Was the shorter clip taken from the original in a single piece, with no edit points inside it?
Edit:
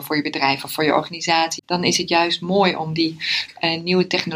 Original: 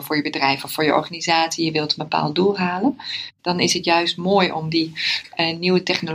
no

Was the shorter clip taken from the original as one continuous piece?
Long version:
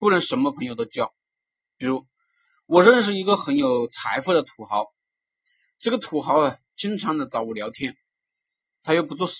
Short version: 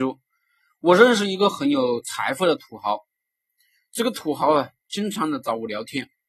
yes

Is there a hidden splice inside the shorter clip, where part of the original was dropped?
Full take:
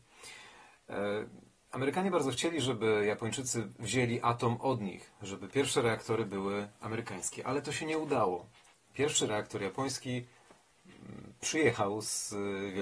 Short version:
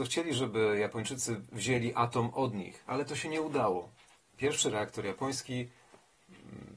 yes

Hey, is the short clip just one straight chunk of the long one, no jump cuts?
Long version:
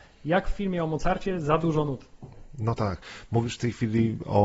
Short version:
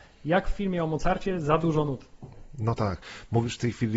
yes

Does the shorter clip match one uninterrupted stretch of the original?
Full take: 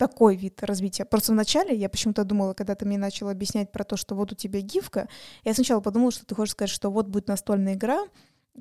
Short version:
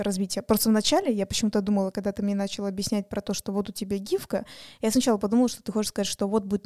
yes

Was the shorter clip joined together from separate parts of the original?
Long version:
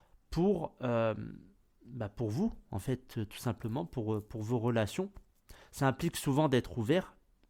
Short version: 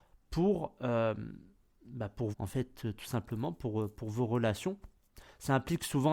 yes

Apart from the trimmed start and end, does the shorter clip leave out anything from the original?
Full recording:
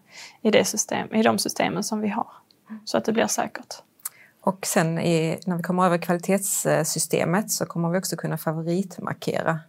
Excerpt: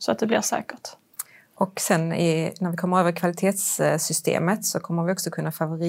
no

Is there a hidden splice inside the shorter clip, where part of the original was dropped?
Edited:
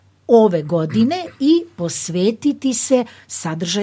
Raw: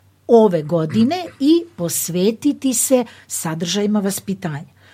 no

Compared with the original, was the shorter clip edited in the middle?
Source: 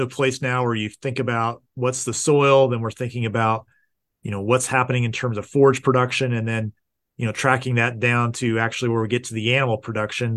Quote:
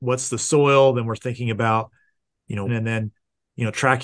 yes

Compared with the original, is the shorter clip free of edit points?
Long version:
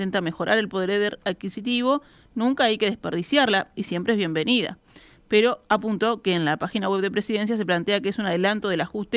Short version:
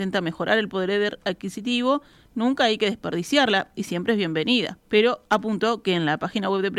no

